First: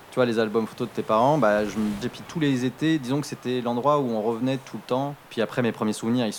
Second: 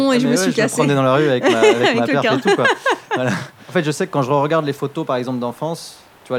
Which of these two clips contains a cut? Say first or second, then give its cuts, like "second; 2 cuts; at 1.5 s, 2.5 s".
first; 1 cut; at 2.0 s